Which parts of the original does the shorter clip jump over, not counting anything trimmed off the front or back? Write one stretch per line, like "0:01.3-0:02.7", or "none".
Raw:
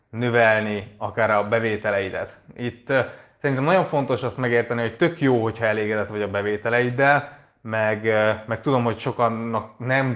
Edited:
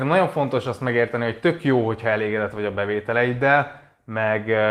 none